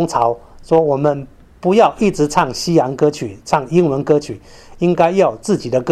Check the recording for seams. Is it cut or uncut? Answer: uncut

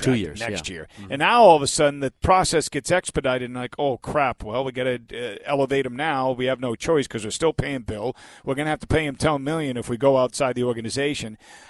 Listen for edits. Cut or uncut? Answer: uncut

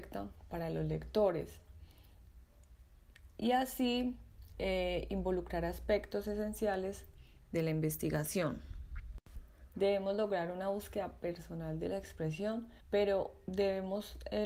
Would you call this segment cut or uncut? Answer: cut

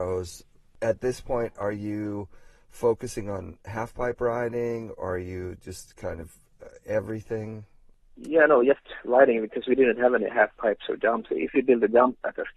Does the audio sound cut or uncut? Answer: uncut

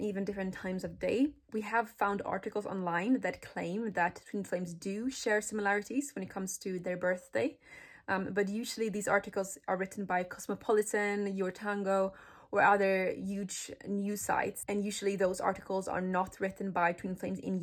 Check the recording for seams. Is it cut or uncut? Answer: uncut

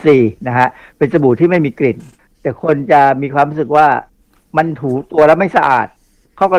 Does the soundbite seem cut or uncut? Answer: uncut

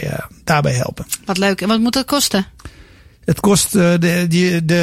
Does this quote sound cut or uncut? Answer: uncut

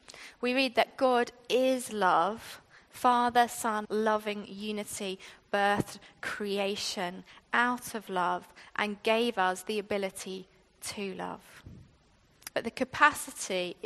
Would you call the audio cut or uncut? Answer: cut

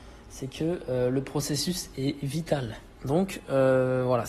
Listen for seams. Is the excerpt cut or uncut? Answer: cut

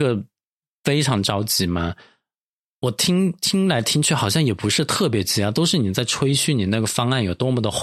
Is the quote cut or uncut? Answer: uncut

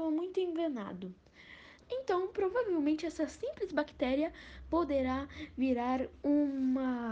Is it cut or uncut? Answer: cut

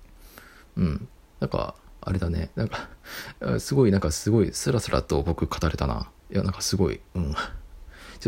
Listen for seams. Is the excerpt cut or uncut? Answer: cut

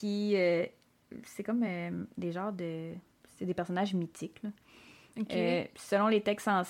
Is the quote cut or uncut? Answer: uncut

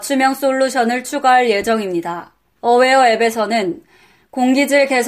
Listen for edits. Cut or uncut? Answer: cut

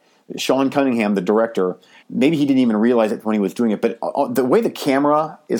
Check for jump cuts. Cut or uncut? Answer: cut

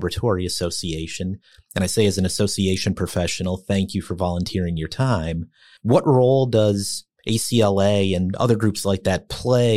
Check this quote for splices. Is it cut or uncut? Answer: uncut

